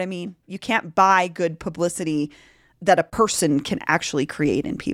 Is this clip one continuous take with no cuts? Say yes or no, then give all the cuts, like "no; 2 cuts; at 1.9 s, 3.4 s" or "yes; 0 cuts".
yes; 0 cuts